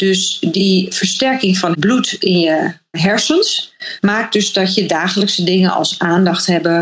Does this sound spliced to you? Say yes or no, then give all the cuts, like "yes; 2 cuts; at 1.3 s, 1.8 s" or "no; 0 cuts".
no; 0 cuts